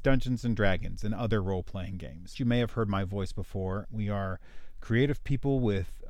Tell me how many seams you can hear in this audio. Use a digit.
2